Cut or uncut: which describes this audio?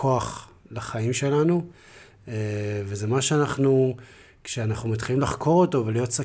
uncut